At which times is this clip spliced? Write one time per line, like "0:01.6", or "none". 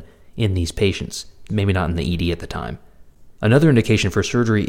0:01.5
0:03.4